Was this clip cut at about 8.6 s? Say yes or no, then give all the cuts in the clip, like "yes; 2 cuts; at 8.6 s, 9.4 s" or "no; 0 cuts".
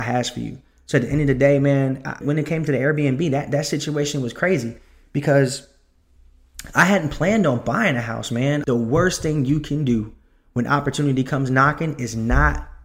yes; 2 cuts; at 2.2 s, 8.6 s